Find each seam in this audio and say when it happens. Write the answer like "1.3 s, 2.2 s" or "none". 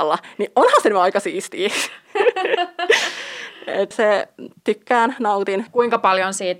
3.9 s, 5.7 s